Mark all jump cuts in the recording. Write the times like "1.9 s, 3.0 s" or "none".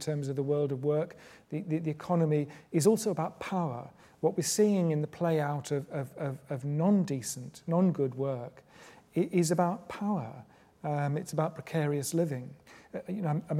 none